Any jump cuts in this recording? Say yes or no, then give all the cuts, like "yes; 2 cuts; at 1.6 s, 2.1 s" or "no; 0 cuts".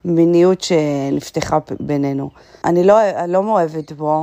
yes; 1 cut; at 2.6 s